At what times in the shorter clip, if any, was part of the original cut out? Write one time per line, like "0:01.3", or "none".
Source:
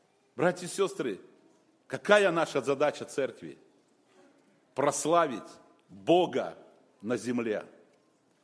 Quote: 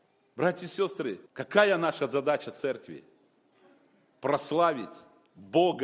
0:01.3